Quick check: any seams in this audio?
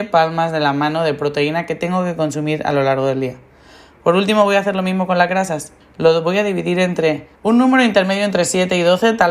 yes; 2 cuts; at 5.8 s, 7.4 s

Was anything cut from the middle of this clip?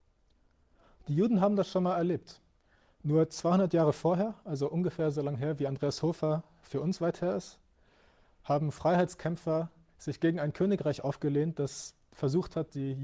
no; 0 cuts

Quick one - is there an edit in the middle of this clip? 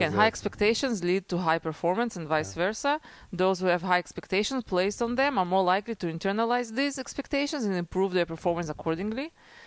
no; 0 cuts

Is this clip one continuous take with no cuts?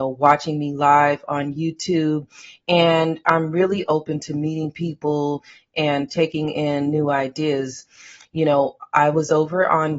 yes; 0 cuts

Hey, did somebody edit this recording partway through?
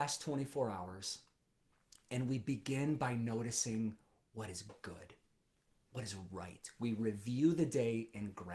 no; 0 cuts

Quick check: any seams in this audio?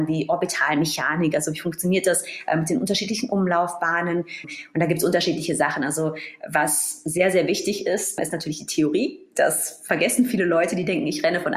yes; 1 cut; at 4.4 s

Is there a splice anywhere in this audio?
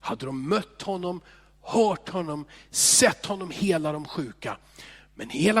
no; 0 cuts

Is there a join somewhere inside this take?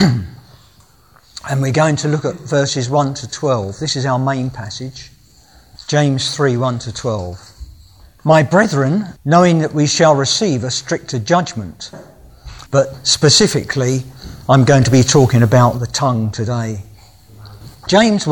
yes; 2 cuts; at 9.2 s, 12.7 s

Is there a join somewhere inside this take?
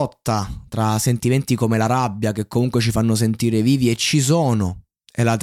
no; 0 cuts

